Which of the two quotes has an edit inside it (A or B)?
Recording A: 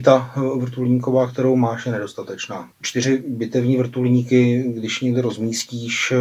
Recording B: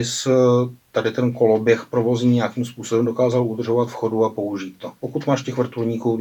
A